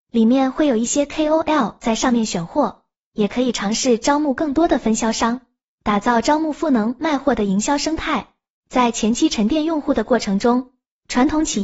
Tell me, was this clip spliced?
no; 0 cuts

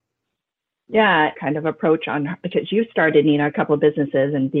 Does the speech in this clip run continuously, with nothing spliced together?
no; 1 cut; at 1.3 s

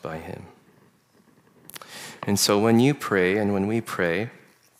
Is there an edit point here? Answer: no; 0 cuts

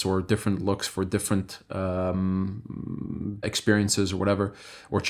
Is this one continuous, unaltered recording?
no; 1 cut; at 3.4 s

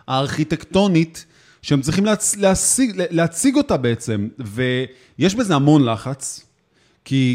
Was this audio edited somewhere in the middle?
no; 0 cuts

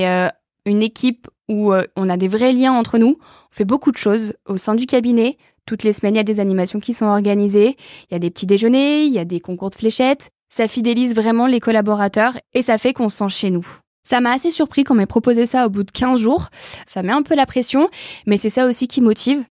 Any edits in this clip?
yes; 2 cuts; at 13.9 s, 16.8 s

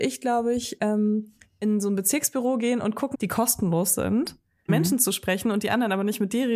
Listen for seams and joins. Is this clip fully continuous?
no; 2 cuts; at 3.1 s, 4.7 s

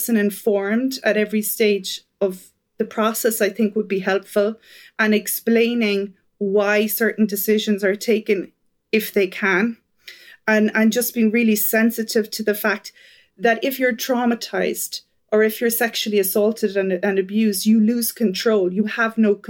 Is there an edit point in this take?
no; 0 cuts

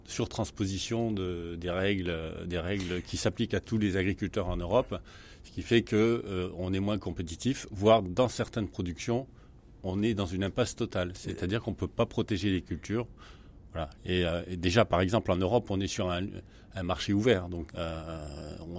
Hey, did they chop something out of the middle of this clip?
yes; 2 cuts; at 14.0 s, 17.7 s

